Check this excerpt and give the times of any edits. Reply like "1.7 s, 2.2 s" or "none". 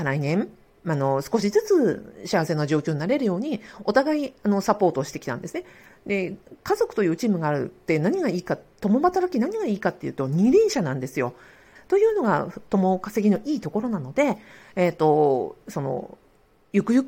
11.8 s, 15.6 s